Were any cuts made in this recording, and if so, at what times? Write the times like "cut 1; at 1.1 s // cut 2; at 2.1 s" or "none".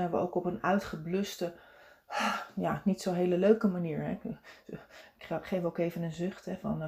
none